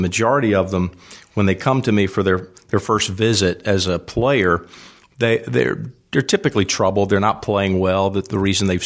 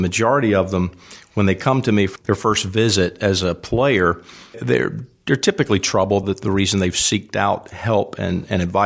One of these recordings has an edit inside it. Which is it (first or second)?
second